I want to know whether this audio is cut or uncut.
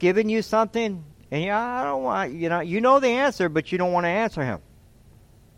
uncut